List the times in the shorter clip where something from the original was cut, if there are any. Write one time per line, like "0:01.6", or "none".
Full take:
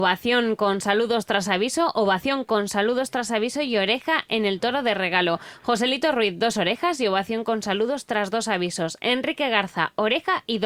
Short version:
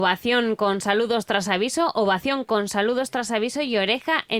none